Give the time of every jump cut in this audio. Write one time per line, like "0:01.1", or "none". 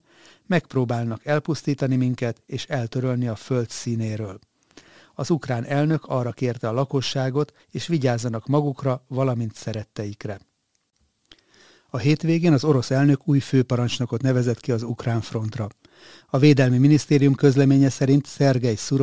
0:07.6

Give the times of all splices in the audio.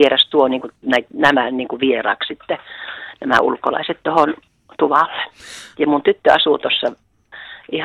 0:05.7

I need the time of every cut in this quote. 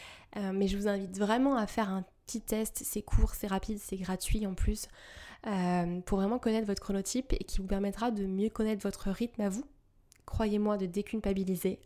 none

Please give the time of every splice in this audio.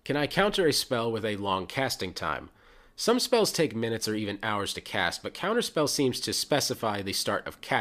none

